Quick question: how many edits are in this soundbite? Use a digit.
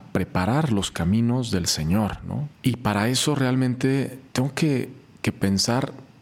2